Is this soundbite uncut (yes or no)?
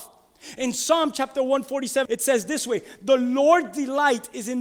no